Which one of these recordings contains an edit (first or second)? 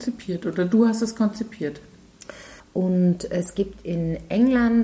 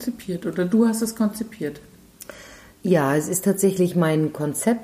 first